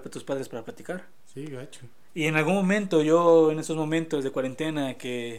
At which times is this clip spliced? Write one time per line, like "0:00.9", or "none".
none